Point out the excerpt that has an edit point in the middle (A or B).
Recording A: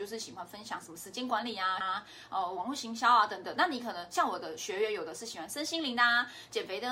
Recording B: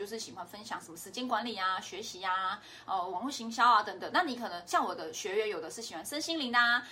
A